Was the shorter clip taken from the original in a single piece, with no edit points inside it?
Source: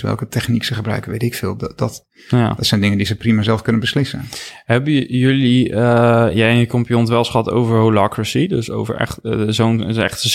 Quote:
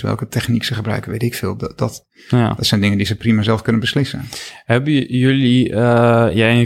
yes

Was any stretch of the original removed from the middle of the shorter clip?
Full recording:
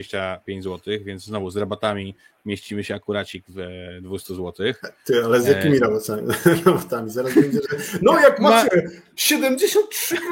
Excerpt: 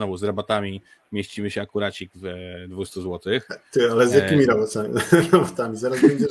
no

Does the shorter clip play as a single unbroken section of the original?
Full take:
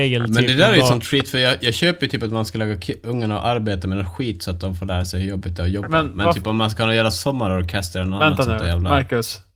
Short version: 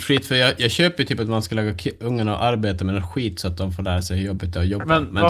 yes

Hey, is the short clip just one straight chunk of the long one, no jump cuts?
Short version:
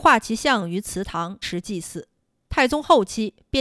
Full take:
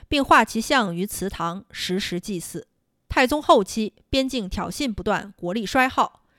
no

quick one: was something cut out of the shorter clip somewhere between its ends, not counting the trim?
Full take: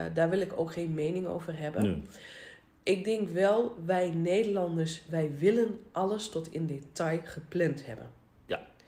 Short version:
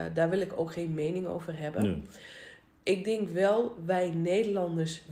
no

